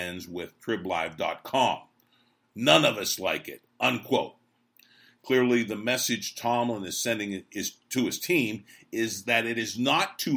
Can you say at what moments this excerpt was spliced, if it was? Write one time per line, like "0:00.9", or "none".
0:02.4

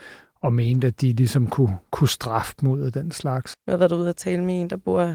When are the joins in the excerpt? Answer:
0:03.5

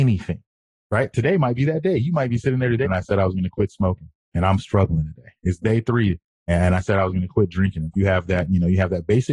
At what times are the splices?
0:02.8
0:07.9

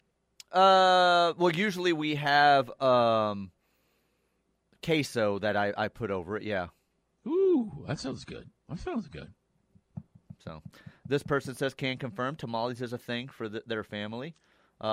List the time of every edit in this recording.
0:08.6

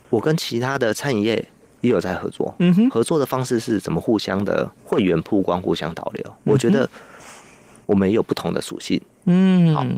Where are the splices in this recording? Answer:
0:04.8
0:07.8

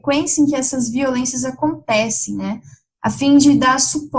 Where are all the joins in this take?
none

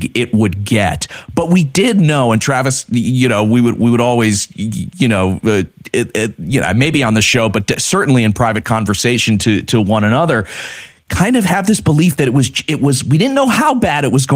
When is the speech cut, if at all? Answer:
none

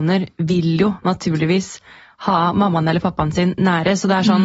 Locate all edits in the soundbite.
none

